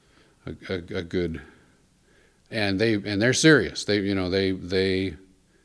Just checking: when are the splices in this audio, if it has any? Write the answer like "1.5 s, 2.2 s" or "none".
2.5 s